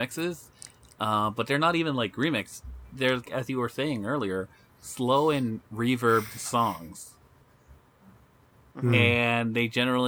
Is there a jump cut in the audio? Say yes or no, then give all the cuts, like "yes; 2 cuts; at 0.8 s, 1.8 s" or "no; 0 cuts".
yes; 1 cut; at 3.3 s